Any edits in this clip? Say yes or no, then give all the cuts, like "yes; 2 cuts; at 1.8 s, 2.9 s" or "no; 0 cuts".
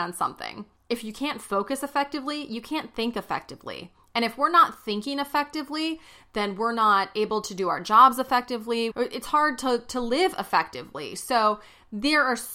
yes; 1 cut; at 8.9 s